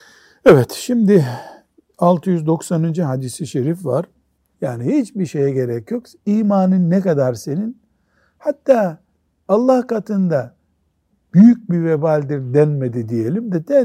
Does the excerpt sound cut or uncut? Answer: cut